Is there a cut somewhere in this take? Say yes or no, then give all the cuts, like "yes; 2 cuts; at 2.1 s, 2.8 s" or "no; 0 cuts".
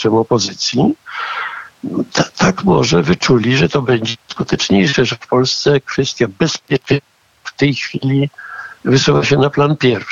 no; 0 cuts